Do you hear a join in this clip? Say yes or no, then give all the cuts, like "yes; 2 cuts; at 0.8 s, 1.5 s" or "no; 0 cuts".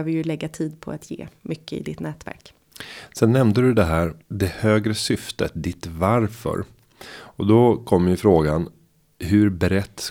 yes; 1 cut; at 4.2 s